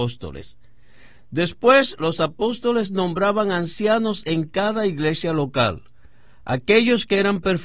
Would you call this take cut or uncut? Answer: uncut